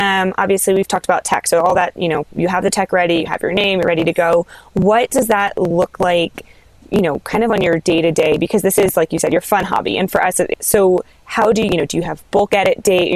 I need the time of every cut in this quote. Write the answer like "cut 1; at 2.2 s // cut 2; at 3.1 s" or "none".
cut 1; at 10.5 s // cut 2; at 11.7 s